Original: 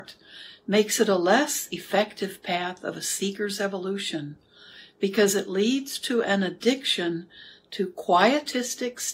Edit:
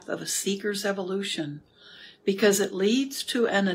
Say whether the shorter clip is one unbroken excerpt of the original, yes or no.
yes